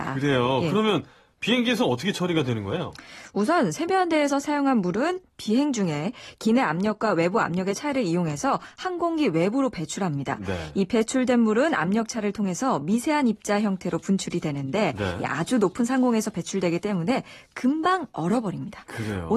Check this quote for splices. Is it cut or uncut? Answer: uncut